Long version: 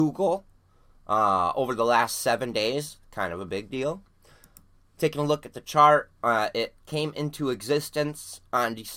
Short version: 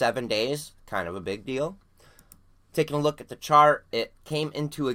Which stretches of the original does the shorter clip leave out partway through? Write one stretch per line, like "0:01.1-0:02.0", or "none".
0:06.2-0:06.5